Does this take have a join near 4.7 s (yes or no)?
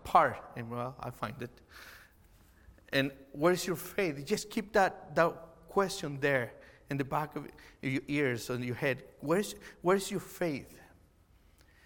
no